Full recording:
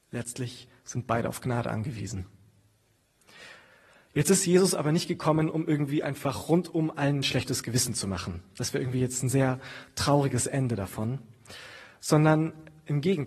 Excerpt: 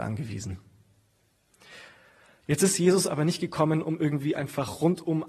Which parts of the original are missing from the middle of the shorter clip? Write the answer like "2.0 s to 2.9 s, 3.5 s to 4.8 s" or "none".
none